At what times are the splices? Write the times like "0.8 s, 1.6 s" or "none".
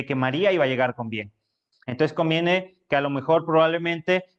1.7 s